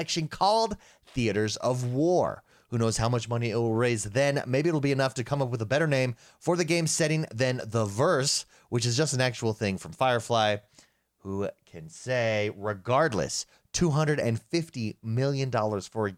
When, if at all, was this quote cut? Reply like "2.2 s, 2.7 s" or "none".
none